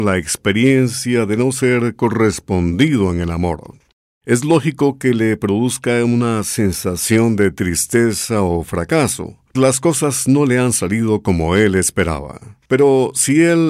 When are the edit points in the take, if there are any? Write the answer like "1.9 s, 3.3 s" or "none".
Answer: 9.6 s